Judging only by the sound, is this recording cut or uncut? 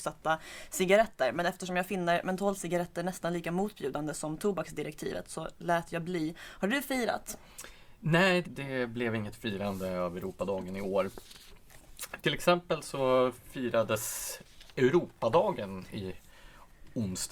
cut